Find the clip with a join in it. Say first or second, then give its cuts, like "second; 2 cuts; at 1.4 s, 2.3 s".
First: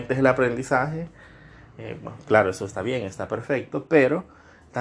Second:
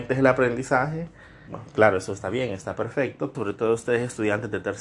second; 2 cuts; at 1.5 s, 3.3 s